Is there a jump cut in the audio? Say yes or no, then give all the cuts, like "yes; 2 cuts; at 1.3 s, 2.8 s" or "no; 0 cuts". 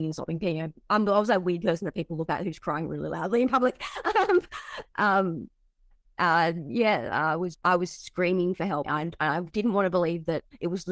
yes; 2 cuts; at 7.5 s, 8.8 s